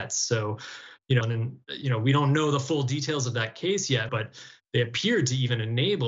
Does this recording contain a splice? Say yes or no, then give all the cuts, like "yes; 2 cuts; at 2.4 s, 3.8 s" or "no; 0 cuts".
yes; 2 cuts; at 1.2 s, 4.1 s